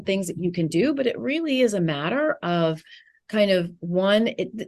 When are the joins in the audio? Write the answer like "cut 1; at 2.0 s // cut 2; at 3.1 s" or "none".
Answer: none